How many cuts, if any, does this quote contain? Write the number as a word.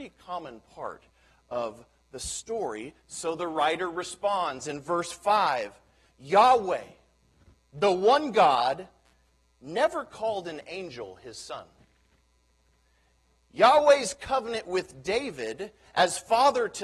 zero